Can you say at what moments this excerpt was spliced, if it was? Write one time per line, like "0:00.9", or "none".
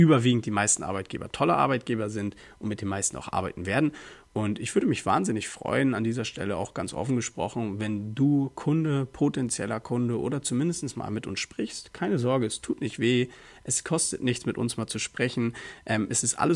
none